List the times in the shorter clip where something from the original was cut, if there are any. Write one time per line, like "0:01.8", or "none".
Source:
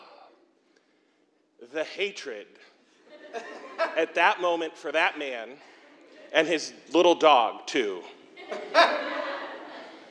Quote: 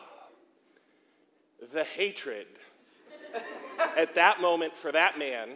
none